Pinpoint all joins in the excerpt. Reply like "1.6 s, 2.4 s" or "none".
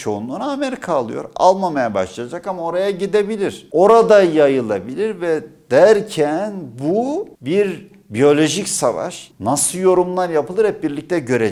9.3 s